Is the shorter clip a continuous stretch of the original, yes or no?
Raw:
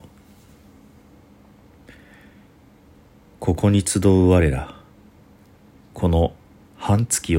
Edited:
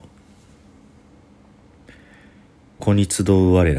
no